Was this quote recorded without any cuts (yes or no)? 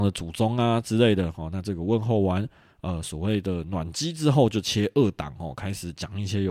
yes